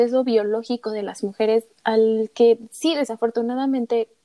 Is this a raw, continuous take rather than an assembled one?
yes; 0 cuts

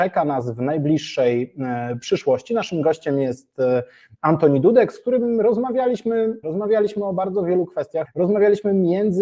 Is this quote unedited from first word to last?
no; 2 cuts; at 6.4 s, 8.0 s

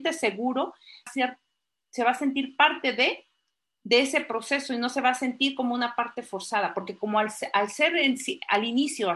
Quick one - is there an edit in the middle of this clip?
yes; 1 cut; at 1.1 s

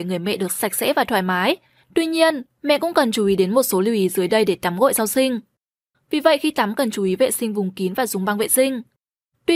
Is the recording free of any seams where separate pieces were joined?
no; 1 cut; at 5.9 s

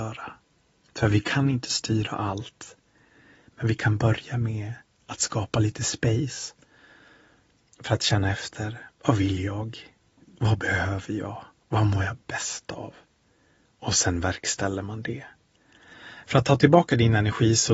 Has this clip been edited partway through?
yes; 1 cut; at 16.2 s

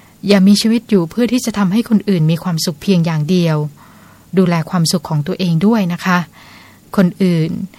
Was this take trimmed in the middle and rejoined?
no; 0 cuts

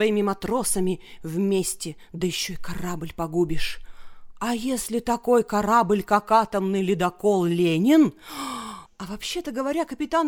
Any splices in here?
yes; 1 cut; at 8.9 s

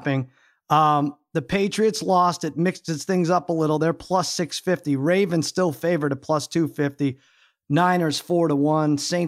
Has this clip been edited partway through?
no; 0 cuts

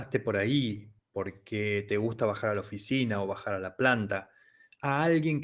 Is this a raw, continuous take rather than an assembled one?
yes; 0 cuts

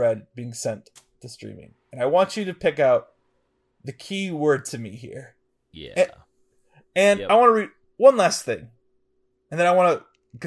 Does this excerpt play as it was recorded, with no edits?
no; 1 cut; at 5.7 s

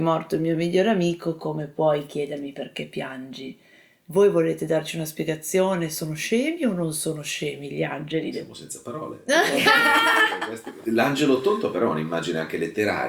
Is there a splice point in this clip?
no; 0 cuts

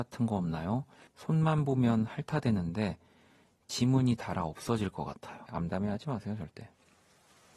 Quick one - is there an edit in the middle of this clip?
yes; 2 cuts; at 1.1 s, 5.5 s

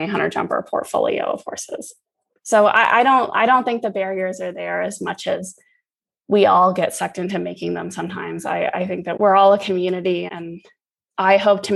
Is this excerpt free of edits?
no; 2 cuts; at 9.2 s, 10.3 s

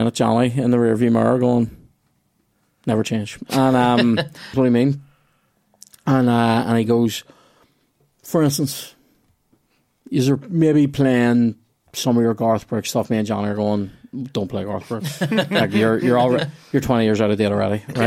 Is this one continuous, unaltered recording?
no; 1 cut; at 4.5 s

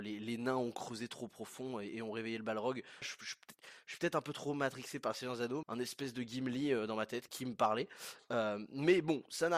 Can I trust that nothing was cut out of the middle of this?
no; 3 cuts; at 3.0 s, 5.6 s, 7.3 s

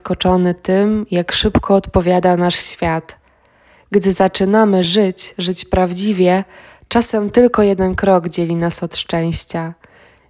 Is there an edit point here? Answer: no; 0 cuts

